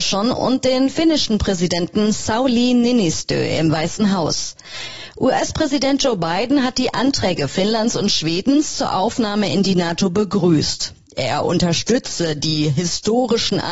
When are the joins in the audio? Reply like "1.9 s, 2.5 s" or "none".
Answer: none